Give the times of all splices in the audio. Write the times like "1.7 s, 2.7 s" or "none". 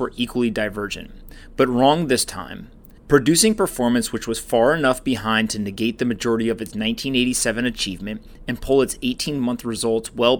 3.0 s